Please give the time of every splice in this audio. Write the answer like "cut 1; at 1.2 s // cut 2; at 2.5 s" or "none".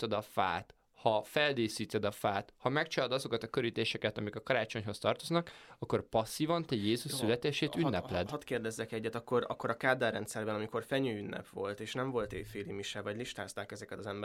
none